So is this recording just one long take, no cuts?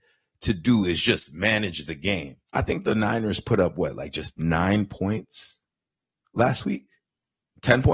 no; 1 cut; at 2.4 s

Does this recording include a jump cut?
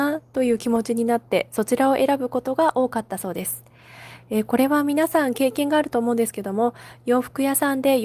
no; 0 cuts

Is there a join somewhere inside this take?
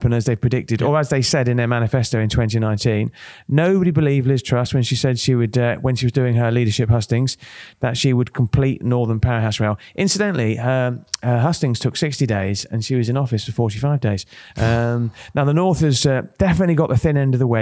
no; 0 cuts

